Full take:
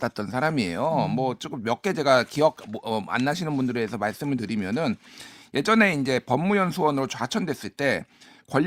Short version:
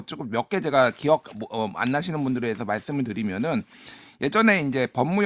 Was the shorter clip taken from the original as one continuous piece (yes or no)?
yes